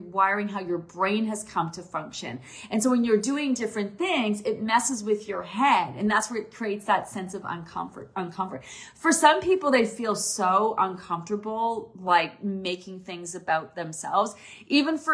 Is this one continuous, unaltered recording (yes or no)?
yes